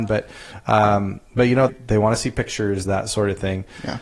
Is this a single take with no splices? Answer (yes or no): no